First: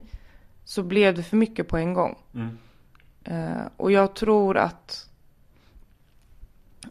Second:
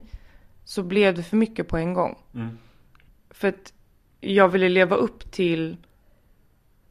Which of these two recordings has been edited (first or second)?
second